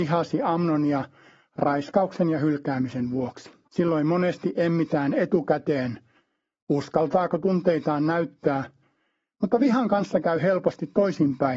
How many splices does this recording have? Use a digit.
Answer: 1